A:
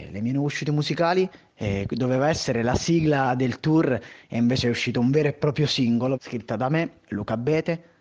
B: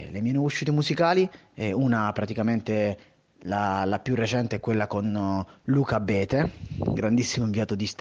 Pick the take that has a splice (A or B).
A